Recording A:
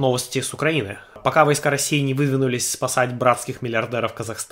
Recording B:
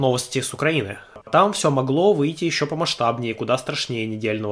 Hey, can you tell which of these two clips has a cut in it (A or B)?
B